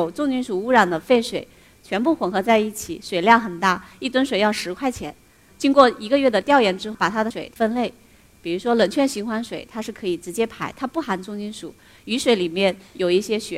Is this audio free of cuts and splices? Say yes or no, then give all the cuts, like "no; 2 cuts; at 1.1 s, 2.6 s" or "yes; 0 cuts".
no; 2 cuts; at 5.5 s, 6.9 s